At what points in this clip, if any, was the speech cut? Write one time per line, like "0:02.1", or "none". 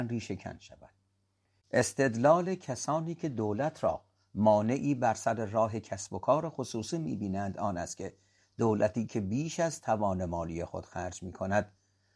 none